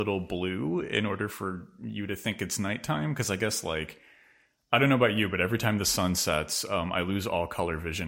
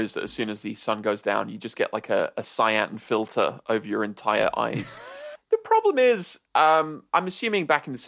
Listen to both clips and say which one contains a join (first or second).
second